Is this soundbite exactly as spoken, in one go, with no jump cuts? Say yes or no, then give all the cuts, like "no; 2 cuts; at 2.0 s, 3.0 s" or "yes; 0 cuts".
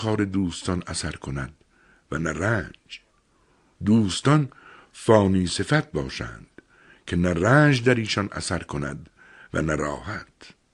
yes; 0 cuts